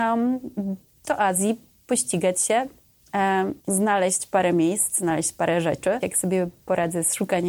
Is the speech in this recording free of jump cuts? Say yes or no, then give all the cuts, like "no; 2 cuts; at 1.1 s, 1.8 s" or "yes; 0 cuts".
no; 2 cuts; at 3.6 s, 6.0 s